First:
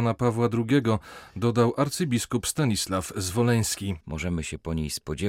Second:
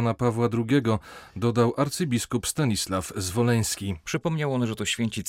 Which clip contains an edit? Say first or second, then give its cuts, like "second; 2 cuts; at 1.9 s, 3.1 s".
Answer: first; 1 cut; at 4.0 s